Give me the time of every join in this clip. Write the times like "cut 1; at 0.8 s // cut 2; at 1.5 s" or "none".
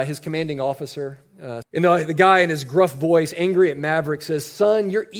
cut 1; at 1.6 s